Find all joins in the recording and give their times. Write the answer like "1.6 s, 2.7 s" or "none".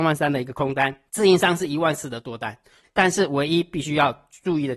1.1 s, 2.8 s